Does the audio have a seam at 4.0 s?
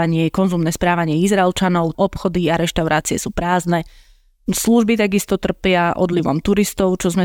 no; 1 cut; at 1.9 s

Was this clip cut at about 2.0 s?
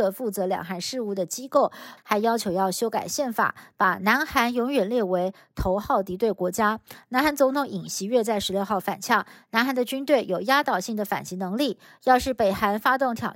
yes; 1 cut; at 2.0 s

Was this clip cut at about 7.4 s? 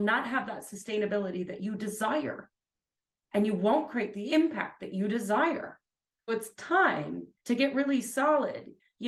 yes; 2 cuts; at 6.3 s, 7.4 s

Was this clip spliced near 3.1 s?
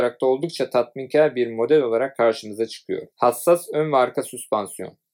yes; 1 cut; at 3.1 s

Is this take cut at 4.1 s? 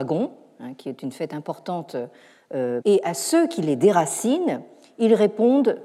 no; 1 cut; at 2.8 s

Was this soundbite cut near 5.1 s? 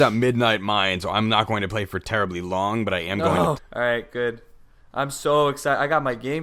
no; 1 cut; at 3.6 s

